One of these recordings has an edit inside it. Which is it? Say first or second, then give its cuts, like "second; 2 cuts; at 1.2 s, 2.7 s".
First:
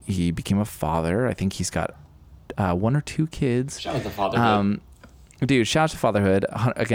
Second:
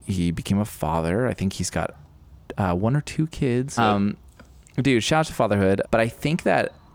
second; 2 cuts; at 3.8 s, 5.9 s